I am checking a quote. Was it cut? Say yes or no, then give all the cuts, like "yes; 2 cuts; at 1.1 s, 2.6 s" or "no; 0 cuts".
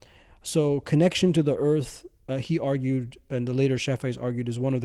no; 0 cuts